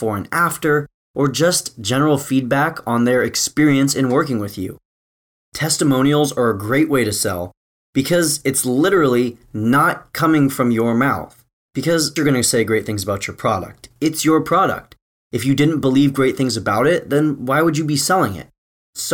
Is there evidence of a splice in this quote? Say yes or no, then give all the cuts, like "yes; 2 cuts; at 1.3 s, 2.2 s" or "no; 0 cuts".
yes; 1 cut; at 12.2 s